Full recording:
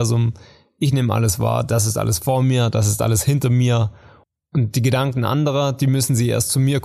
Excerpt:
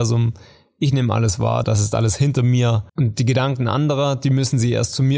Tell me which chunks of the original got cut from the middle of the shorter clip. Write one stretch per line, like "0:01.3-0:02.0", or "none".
0:01.6-0:02.7
0:04.0-0:04.5